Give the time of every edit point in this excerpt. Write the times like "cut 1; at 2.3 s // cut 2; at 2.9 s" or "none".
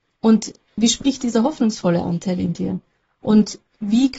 cut 1; at 3.2 s

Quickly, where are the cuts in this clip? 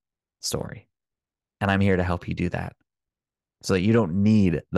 none

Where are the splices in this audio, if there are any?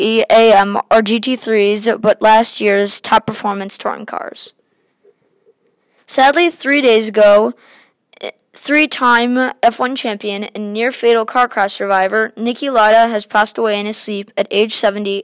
cut 1; at 6.0 s

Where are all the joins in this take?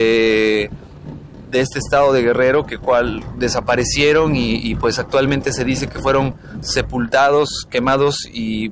none

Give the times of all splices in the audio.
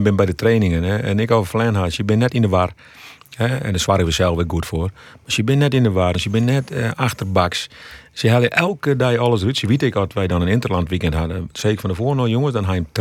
cut 1; at 6.1 s

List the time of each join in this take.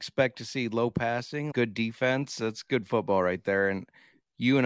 cut 1; at 1.5 s

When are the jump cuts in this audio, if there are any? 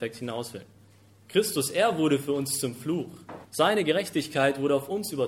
cut 1; at 3.4 s

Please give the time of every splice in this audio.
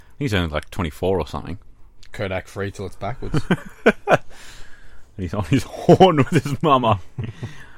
none

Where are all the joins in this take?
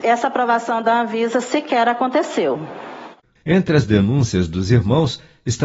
cut 1; at 3.4 s

